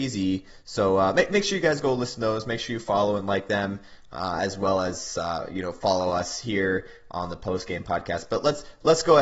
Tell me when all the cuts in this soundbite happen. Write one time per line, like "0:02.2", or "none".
none